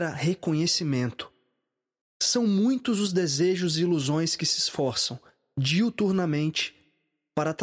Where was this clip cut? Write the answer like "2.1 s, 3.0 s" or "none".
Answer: 2.0 s